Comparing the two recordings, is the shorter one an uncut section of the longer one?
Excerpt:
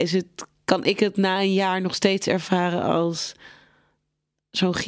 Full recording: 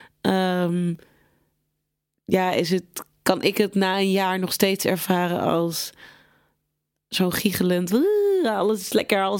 yes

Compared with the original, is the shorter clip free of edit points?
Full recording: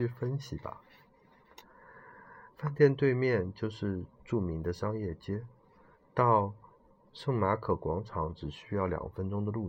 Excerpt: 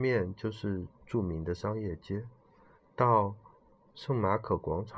yes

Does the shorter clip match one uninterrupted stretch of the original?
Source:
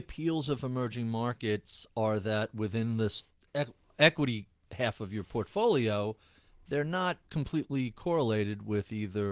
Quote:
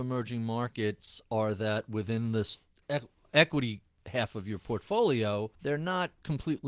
no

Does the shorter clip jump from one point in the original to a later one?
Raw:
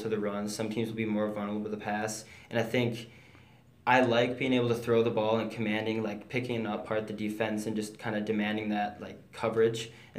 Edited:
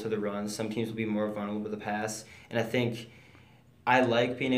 no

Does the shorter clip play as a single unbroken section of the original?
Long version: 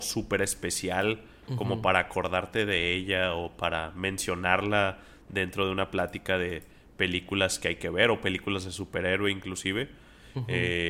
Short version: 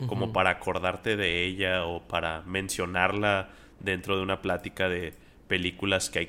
yes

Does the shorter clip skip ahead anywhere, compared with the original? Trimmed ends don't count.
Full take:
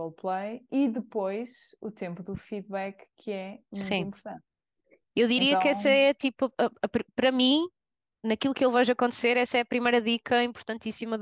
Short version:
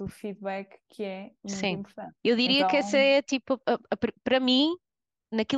yes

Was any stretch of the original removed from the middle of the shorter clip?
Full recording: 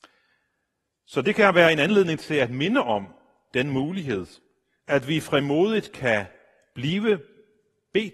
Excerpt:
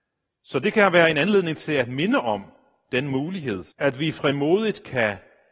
yes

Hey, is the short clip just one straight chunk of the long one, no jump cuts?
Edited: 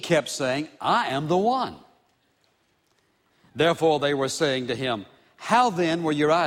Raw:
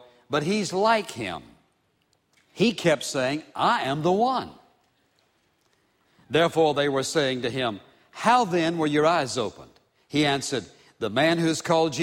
yes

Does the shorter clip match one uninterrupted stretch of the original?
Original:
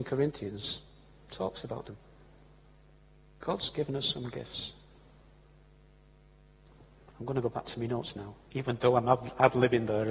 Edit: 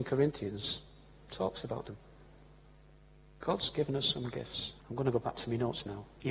no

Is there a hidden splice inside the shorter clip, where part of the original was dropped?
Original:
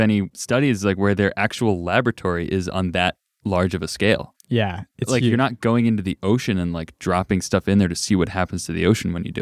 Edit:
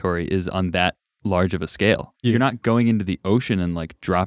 yes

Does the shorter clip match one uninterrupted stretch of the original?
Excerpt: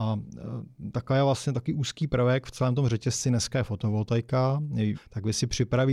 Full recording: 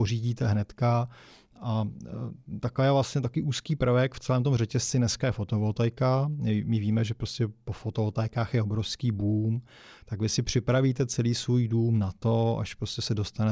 no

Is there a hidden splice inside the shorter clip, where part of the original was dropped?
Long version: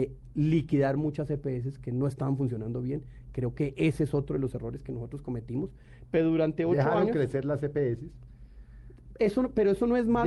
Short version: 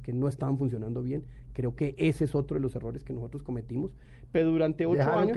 no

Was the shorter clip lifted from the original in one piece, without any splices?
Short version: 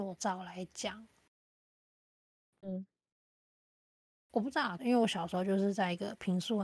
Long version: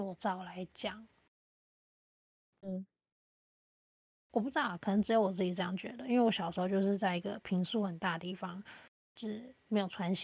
no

